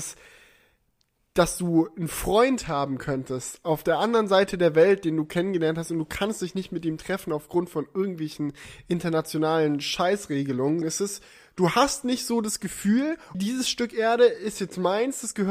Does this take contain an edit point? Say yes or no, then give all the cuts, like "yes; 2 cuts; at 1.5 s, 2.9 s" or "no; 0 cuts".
yes; 2 cuts; at 10.8 s, 13.3 s